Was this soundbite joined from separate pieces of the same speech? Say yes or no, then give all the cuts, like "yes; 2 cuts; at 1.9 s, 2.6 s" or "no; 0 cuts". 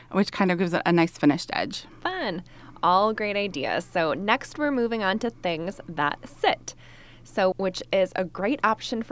yes; 1 cut; at 7.5 s